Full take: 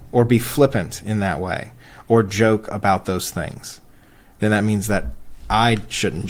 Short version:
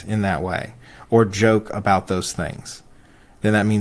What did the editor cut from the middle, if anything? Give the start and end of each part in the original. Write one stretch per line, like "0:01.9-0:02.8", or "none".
none

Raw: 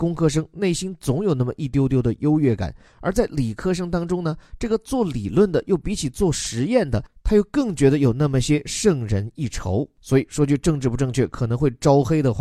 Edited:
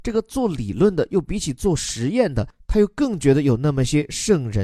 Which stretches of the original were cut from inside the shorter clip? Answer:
none

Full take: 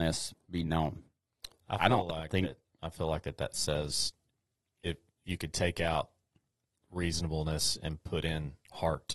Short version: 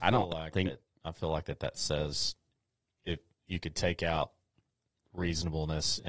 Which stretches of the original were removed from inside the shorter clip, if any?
none

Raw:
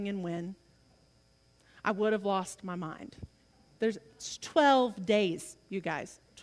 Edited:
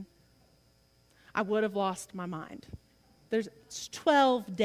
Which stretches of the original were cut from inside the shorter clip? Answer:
none

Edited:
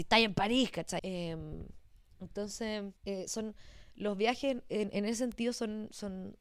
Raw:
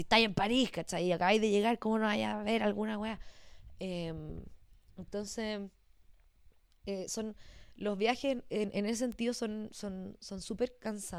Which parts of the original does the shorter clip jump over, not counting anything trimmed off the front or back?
0:01.0-0:03.8
0:05.7-0:06.8

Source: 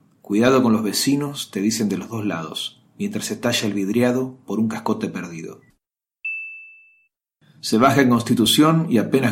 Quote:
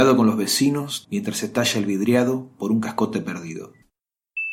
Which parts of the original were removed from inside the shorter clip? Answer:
0:01.5-0:02.9

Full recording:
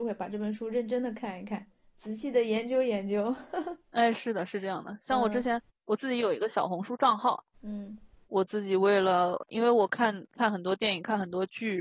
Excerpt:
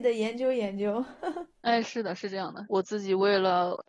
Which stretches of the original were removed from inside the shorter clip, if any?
0:05.0-0:08.3

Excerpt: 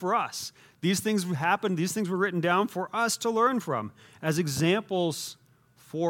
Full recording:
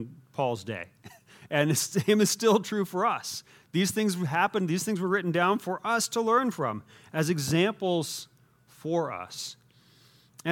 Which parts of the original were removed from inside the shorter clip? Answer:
none

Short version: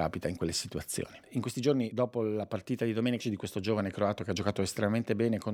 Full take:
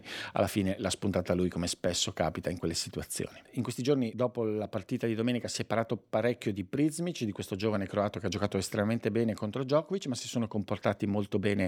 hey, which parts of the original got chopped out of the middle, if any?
0:05.4-0:07.2

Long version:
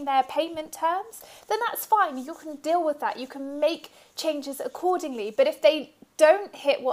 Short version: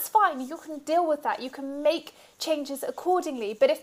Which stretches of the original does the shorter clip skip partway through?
none

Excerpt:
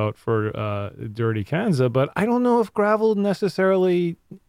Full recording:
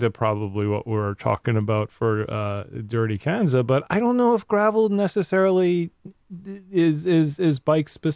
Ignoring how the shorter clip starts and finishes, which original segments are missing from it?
none

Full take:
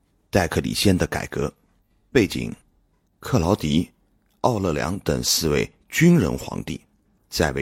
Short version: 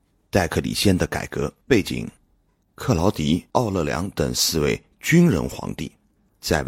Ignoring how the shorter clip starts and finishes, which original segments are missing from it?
0:01.6-0:02.1
0:03.9-0:04.4

